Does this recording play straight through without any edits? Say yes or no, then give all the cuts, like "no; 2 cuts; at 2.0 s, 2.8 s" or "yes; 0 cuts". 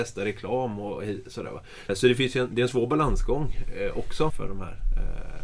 no; 2 cuts; at 1.9 s, 4.3 s